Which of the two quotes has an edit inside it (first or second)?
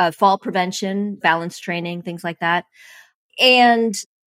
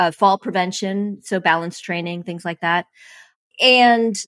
first